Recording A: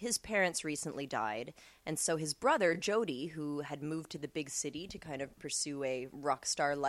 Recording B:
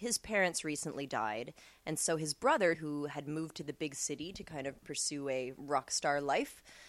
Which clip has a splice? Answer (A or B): B